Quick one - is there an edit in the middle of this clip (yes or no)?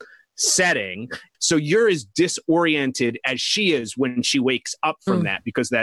yes